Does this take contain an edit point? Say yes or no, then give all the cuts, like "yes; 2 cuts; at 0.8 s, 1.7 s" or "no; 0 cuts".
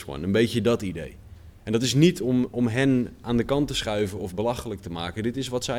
no; 0 cuts